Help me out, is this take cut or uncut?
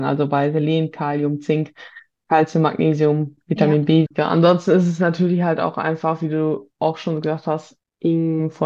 cut